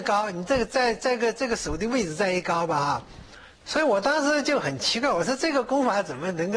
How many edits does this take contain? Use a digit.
1